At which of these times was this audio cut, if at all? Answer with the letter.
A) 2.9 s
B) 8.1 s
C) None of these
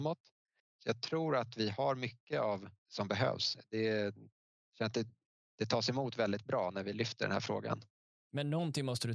A